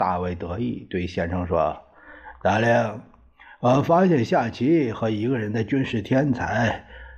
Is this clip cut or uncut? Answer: uncut